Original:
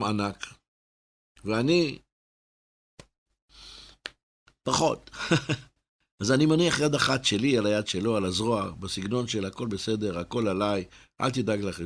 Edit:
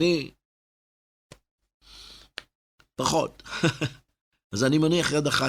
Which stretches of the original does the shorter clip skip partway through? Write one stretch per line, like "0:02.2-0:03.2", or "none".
none